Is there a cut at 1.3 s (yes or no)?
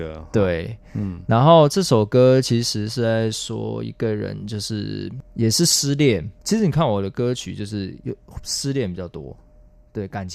no